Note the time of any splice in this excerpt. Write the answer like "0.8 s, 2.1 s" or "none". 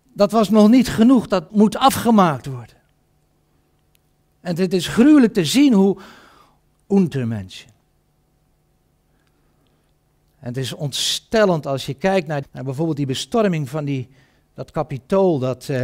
1.5 s, 6.7 s, 12.4 s